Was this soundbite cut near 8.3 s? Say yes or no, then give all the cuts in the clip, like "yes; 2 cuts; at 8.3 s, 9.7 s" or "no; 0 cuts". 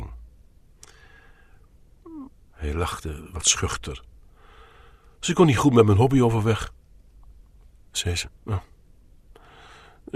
yes; 2 cuts; at 2.3 s, 8.3 s